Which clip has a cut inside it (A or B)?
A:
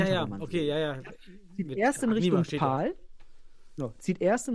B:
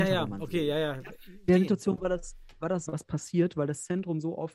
B